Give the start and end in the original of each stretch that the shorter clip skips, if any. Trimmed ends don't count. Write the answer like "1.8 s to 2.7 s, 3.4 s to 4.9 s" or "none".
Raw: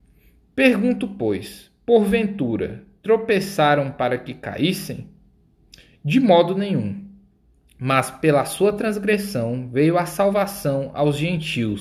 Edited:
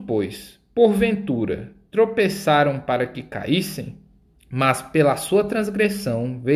5.4 s to 7.6 s